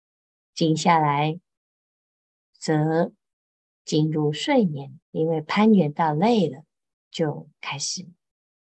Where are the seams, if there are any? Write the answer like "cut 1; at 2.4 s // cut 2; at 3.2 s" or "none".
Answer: cut 1; at 5.0 s // cut 2; at 6.9 s